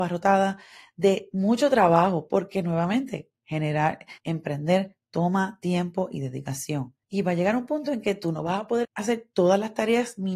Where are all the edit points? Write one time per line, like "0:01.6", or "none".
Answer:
0:04.2
0:07.0
0:08.8